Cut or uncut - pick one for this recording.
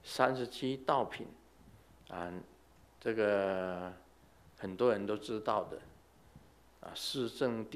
uncut